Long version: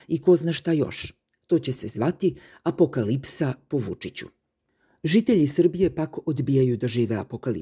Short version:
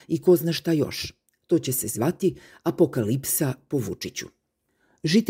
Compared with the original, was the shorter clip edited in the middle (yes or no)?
no